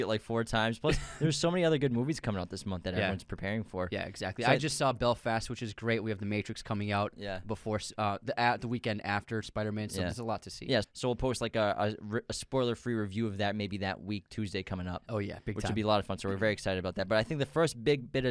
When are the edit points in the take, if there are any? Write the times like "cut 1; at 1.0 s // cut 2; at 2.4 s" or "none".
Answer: cut 1; at 10.8 s